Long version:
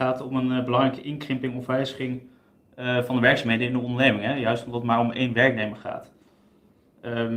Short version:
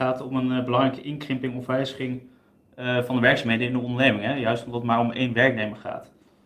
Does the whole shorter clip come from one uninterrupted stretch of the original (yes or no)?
yes